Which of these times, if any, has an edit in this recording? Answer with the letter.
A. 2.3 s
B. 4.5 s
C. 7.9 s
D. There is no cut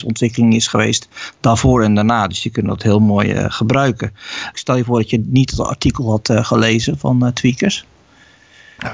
B